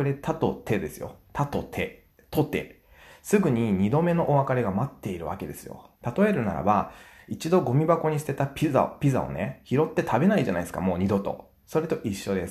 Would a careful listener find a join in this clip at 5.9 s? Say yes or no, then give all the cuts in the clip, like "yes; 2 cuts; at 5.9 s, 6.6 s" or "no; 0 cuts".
yes; 1 cut; at 5.9 s